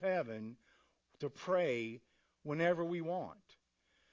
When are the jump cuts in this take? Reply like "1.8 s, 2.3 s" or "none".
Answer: none